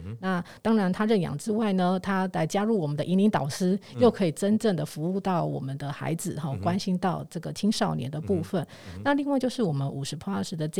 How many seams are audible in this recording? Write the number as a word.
zero